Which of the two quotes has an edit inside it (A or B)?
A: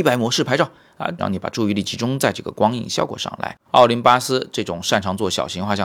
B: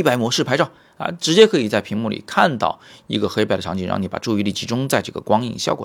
A